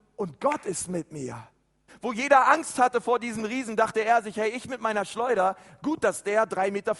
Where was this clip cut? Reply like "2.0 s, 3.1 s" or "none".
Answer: 1.9 s